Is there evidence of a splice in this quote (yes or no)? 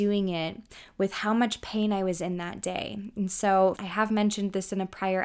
yes